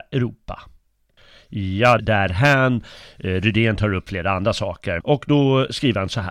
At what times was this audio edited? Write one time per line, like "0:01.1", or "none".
0:02.0
0:05.0